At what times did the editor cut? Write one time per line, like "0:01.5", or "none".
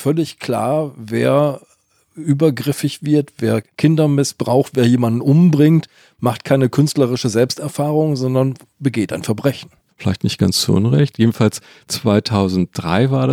0:03.7
0:09.9